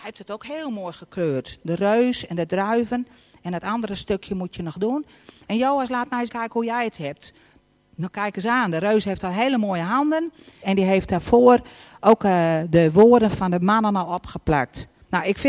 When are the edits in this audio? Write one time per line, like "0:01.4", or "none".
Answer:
0:06.3
0:10.6

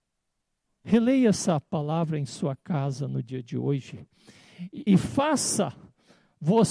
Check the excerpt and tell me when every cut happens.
0:04.9

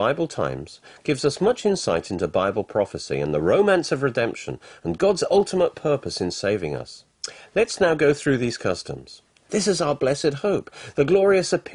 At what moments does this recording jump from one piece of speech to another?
0:09.4

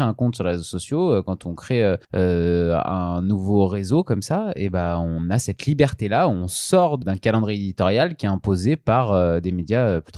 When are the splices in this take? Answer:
0:02.0
0:07.0

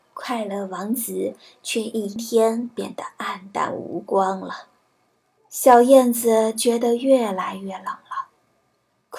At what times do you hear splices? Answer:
0:02.2
0:05.4

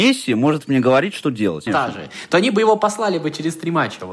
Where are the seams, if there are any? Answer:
0:01.7

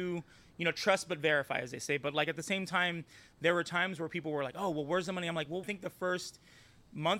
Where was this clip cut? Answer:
0:05.6

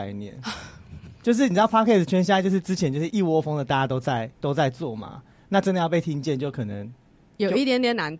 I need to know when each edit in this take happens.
0:03.1
0:04.3

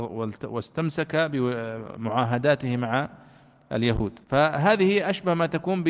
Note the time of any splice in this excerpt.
0:04.2

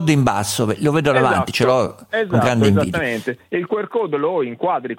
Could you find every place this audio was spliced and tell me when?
none

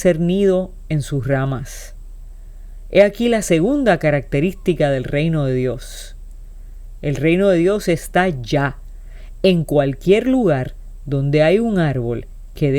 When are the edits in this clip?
none

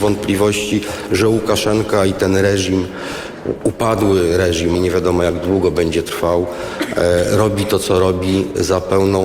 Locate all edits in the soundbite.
0:04.7

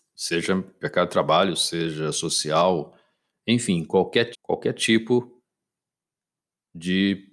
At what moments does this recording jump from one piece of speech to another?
0:01.5
0:04.3

